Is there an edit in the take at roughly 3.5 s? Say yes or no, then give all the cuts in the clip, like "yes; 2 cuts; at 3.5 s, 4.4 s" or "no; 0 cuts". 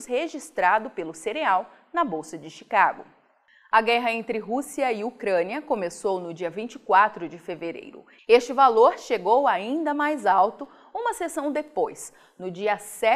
no; 1 cut; at 8.2 s